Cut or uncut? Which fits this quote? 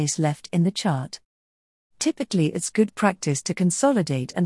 uncut